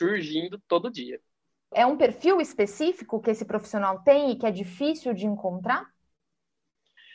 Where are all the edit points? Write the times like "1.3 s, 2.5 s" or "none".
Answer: 1.7 s